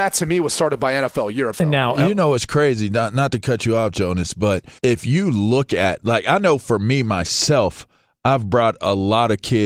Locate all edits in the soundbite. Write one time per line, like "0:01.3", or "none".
0:01.5
0:04.8